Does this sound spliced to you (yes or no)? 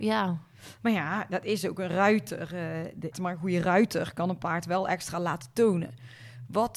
yes